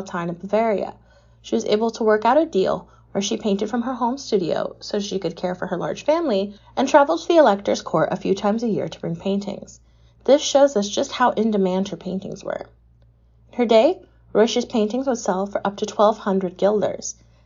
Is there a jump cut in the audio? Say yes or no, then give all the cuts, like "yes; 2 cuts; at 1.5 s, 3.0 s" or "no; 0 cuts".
no; 0 cuts